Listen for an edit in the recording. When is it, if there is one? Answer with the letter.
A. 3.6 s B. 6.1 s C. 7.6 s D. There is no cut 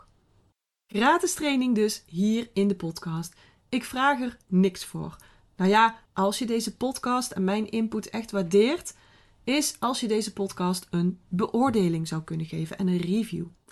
B